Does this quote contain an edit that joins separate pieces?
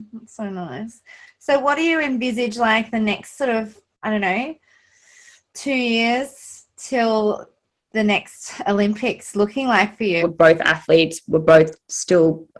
yes; 1 cut; at 10.2 s

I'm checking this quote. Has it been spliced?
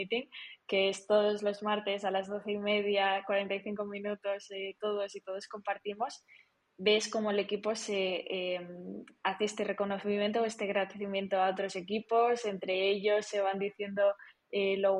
no; 0 cuts

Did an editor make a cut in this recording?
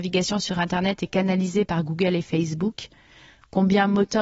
no; 0 cuts

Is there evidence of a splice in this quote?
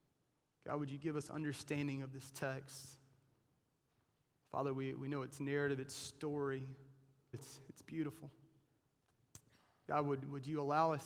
yes; 1 cut; at 7.3 s

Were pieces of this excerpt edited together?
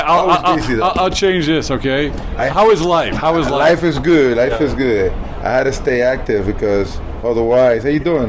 yes; 1 cut; at 2.5 s

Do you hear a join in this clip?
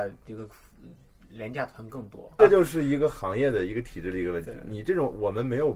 yes; 1 cut; at 2.4 s

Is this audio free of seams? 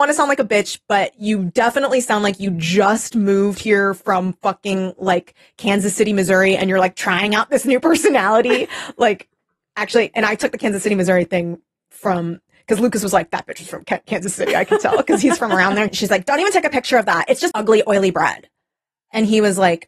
no; 2 cuts; at 15.9 s, 17.5 s

